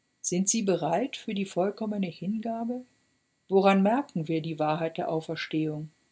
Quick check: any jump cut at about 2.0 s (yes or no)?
no